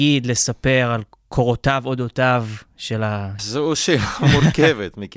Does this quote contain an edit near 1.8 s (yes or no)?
no